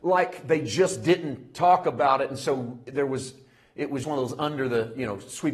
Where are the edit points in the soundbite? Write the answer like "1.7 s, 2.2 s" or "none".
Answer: 4.0 s